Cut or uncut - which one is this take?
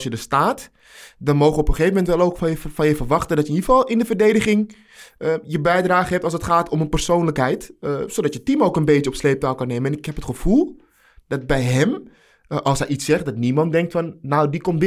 uncut